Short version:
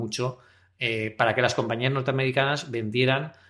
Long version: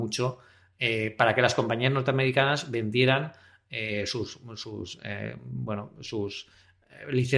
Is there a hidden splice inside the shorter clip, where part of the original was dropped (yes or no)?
no